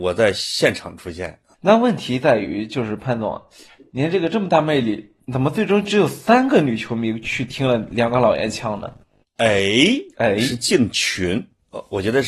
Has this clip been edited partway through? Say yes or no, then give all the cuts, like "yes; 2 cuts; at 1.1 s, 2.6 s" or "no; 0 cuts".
yes; 1 cut; at 5.2 s